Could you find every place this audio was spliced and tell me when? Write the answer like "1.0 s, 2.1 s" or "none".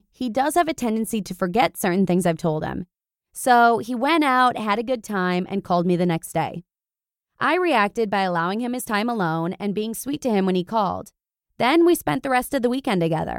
3.1 s